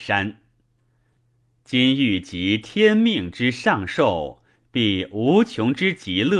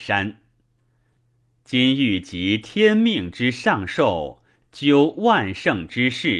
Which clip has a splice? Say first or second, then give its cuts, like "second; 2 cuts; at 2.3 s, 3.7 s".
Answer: second; 1 cut; at 4.6 s